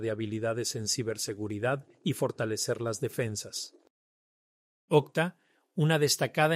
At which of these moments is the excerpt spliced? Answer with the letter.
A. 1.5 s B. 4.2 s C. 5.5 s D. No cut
D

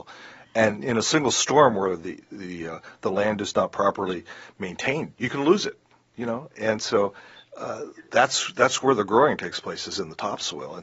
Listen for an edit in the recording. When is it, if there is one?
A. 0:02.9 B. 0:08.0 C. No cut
C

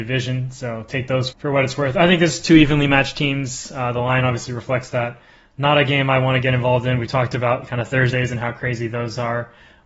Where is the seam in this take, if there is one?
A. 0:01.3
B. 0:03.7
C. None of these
A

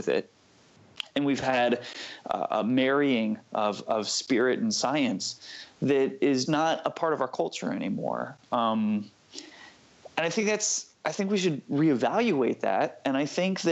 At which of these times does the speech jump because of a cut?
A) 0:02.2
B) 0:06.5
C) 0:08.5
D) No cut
B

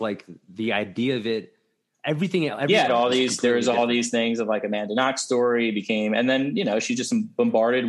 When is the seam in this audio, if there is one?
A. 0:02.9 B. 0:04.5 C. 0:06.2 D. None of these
A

